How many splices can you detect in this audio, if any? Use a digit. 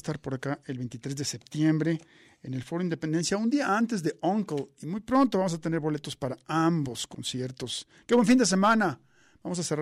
0